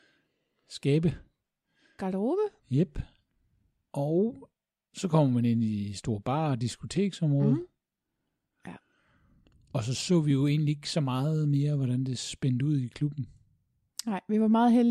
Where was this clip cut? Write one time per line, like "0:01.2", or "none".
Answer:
0:02.6
0:08.5